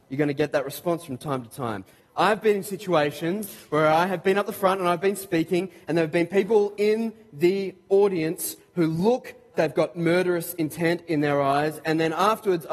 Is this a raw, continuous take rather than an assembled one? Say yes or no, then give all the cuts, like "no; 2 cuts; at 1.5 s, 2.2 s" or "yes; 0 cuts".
no; 2 cuts; at 2.0 s, 9.5 s